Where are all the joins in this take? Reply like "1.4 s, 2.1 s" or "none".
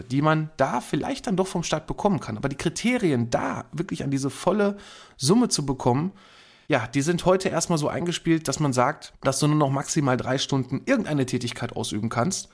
none